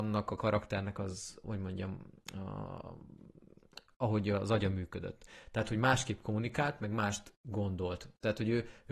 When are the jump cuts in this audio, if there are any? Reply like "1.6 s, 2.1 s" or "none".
1.4 s